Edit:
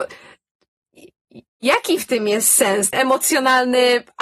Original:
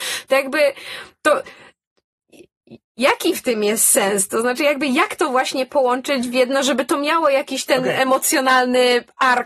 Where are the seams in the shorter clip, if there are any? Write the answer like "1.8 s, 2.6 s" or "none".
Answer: 2.9 s